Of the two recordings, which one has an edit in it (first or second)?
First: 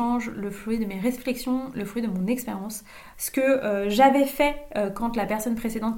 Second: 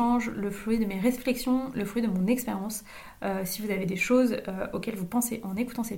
first